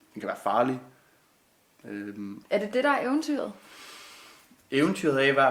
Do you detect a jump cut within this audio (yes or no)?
yes